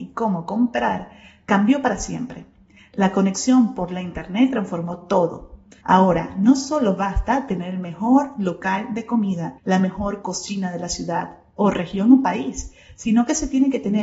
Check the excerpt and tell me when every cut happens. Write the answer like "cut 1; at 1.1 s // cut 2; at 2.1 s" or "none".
cut 1; at 5.8 s // cut 2; at 9.6 s